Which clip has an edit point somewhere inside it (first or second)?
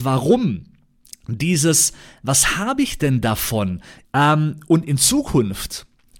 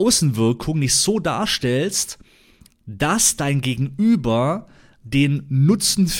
first